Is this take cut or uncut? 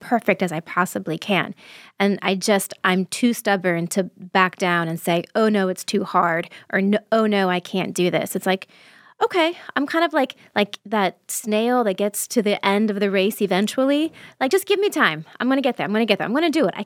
uncut